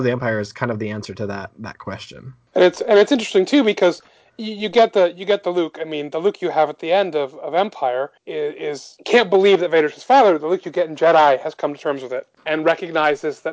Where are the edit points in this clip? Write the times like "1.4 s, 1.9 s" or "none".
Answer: 8.2 s